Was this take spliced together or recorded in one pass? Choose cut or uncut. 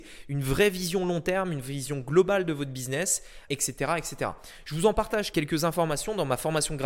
cut